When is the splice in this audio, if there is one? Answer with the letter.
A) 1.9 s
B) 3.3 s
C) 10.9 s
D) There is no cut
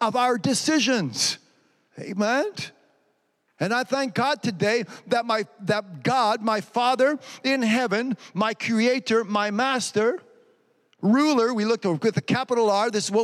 A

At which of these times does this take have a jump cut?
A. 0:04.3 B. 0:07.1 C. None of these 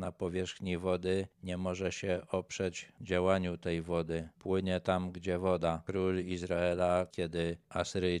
B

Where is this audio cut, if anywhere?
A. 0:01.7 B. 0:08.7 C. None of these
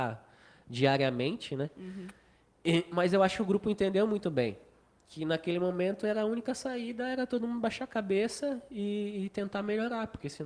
C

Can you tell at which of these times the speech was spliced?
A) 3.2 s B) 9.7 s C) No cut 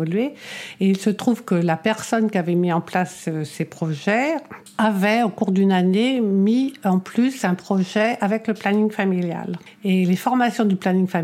C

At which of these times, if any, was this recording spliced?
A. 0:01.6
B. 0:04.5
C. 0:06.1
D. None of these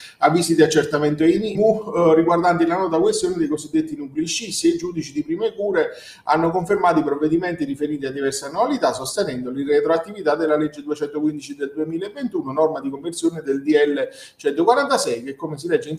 A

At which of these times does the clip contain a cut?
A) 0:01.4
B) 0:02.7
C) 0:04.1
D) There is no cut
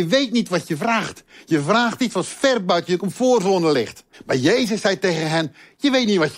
C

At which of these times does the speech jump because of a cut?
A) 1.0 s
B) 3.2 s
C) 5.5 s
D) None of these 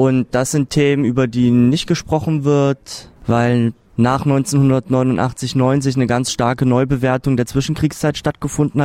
B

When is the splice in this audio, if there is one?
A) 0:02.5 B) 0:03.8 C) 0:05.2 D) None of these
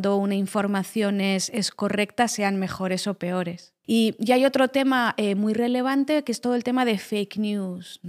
B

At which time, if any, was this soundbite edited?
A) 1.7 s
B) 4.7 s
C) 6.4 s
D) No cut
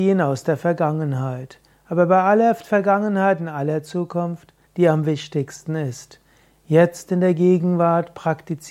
B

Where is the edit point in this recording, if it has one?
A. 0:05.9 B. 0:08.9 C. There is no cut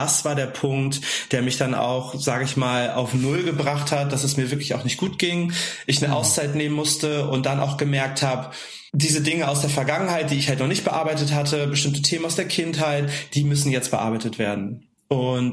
B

